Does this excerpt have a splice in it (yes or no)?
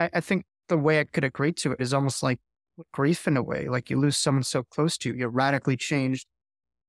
yes